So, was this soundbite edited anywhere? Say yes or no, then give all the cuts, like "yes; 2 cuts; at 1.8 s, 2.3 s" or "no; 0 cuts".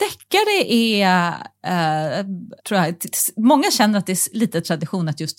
yes; 1 cut; at 2.6 s